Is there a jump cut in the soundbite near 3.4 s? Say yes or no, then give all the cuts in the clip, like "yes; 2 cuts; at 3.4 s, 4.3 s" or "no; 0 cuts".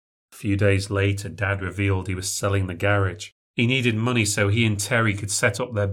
yes; 1 cut; at 3.4 s